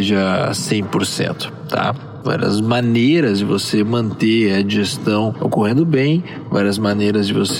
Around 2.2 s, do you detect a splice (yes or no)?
yes